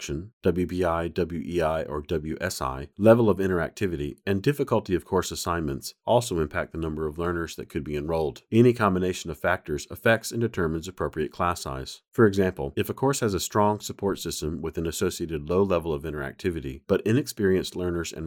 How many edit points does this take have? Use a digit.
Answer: 0